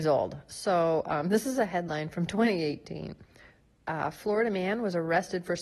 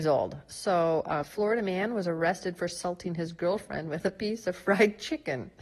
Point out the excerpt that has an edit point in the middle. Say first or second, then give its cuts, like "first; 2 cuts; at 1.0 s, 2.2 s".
second; 1 cut; at 1.2 s